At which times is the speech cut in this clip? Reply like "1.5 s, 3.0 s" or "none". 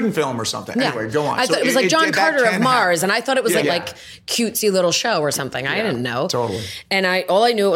3.6 s